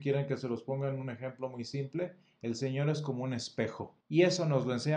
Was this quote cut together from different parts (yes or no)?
yes